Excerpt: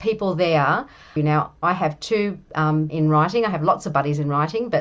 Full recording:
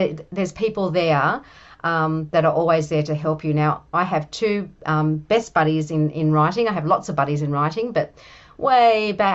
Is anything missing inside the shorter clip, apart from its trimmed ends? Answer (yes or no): yes